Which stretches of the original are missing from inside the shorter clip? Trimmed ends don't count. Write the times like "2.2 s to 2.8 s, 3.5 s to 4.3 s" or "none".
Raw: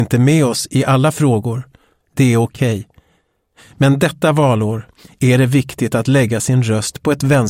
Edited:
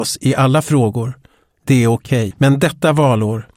2.8 s to 3.7 s